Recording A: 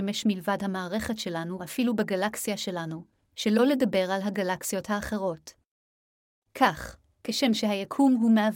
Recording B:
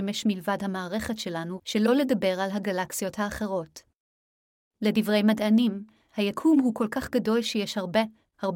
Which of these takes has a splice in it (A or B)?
B